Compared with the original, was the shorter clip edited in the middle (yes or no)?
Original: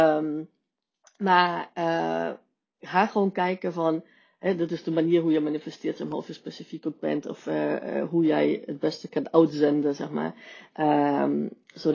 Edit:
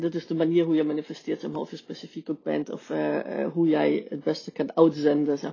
no